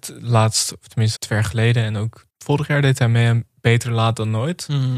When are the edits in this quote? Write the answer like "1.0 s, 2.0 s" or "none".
1.2 s, 2.3 s